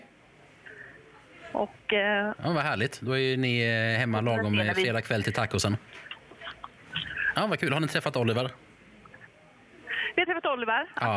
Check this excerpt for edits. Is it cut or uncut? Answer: cut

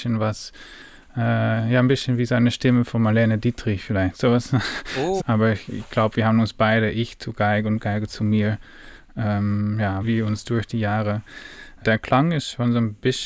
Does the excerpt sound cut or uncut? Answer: cut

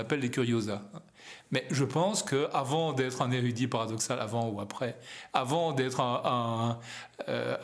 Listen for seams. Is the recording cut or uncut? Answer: uncut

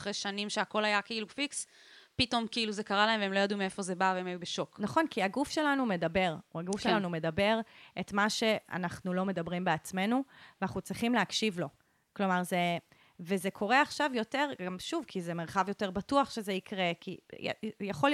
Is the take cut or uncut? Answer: uncut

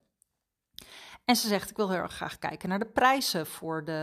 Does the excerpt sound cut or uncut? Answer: uncut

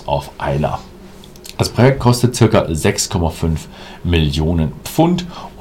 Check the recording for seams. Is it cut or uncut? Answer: uncut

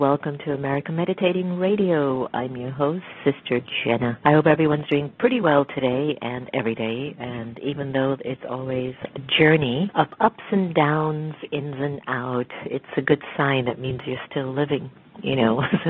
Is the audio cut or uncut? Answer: uncut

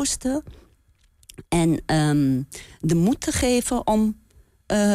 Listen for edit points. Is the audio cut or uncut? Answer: uncut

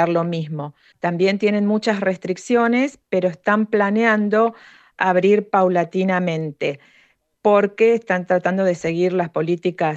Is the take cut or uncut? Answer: cut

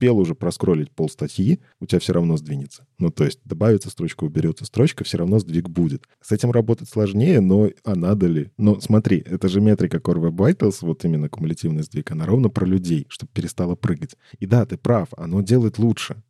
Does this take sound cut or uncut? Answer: cut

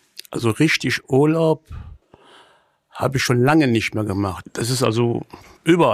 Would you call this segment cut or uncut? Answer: cut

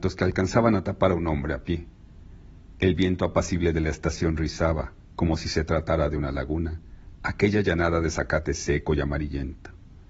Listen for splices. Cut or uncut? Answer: uncut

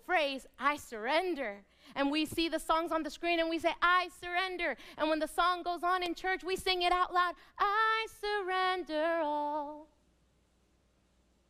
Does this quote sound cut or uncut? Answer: uncut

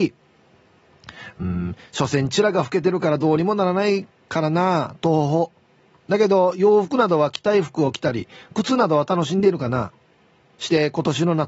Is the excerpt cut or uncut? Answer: uncut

